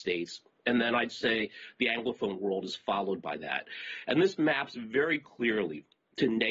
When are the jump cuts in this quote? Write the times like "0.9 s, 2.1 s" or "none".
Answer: none